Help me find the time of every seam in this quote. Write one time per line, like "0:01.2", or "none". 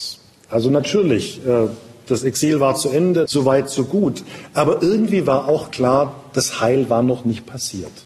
0:03.3